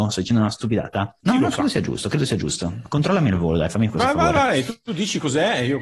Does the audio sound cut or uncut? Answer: cut